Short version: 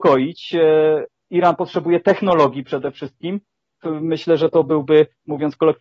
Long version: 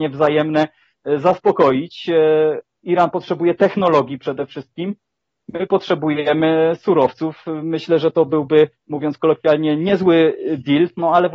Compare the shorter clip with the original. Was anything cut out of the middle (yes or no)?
yes